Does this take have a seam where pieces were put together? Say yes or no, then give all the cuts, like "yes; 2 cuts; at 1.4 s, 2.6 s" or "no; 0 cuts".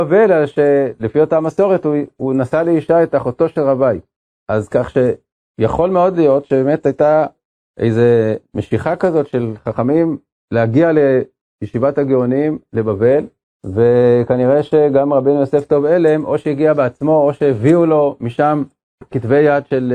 no; 0 cuts